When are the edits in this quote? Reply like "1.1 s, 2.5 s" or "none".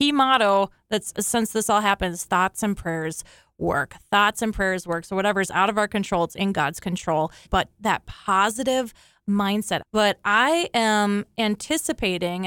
7.5 s, 9.8 s